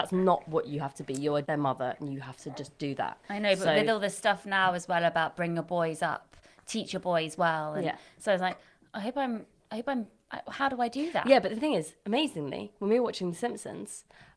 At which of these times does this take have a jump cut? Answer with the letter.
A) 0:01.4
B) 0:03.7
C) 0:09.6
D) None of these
A